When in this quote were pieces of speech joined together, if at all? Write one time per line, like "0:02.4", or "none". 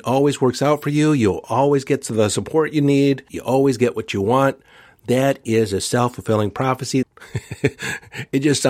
0:03.3
0:07.0